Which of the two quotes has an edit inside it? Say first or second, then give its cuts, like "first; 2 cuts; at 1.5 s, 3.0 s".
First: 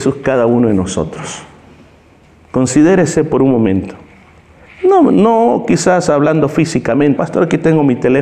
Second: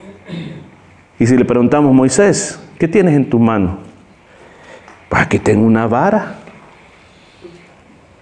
first; 2 cuts; at 4.7 s, 7.2 s